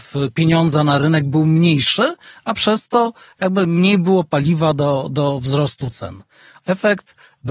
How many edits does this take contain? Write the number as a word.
one